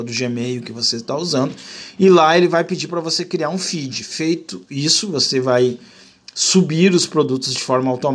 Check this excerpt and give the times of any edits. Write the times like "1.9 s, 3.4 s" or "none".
none